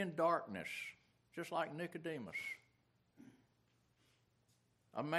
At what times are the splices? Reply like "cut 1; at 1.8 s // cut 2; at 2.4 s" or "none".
none